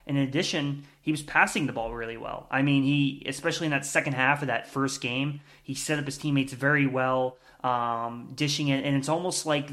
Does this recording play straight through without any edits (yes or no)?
yes